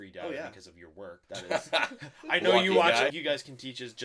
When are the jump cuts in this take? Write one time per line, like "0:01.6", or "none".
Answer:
0:01.2
0:03.1